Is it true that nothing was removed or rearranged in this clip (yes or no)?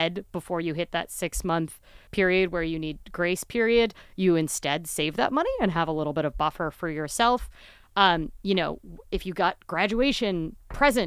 yes